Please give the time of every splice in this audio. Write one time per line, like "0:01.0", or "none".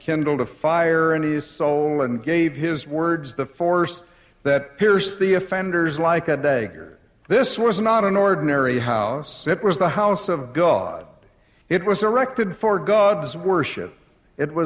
0:07.2